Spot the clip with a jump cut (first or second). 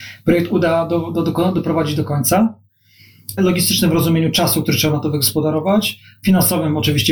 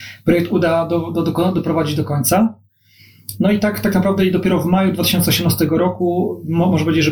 first